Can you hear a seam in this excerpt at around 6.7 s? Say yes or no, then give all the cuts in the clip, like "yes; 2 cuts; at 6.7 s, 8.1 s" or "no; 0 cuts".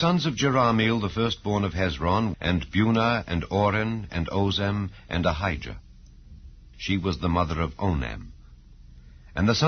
yes; 2 cuts; at 2.3 s, 6.7 s